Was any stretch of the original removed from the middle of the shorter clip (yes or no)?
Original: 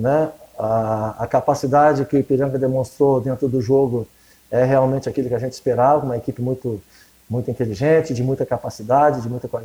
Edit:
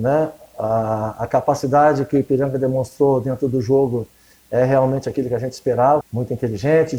yes